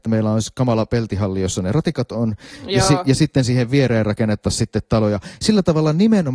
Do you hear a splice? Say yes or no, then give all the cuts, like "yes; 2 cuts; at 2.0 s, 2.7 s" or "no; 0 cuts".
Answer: no; 0 cuts